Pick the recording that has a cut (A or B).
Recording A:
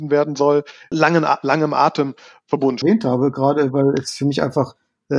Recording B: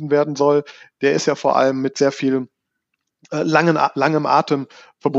A